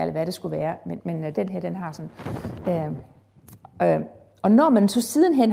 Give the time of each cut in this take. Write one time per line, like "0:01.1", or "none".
0:01.0